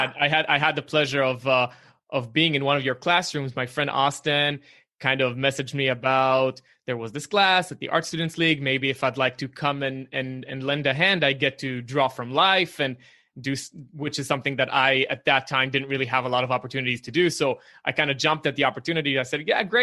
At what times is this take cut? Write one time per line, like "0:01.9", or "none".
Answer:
none